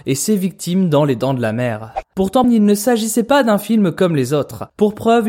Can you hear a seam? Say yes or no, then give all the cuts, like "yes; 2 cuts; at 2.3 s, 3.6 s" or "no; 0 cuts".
yes; 1 cut; at 2.4 s